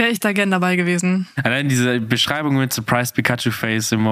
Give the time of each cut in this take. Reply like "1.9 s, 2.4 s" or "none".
1.4 s